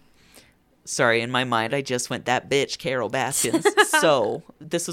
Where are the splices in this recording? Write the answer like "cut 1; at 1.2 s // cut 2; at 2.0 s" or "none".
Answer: none